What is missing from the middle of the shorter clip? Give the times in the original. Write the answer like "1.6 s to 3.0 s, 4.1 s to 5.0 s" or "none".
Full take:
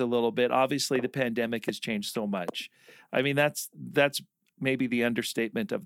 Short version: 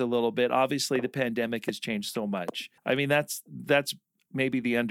2.8 s to 3.0 s